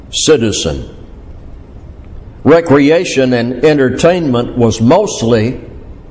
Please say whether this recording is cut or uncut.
uncut